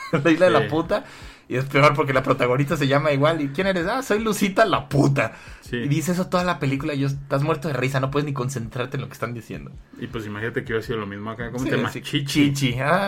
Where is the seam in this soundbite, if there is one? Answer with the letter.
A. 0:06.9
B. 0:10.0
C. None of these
C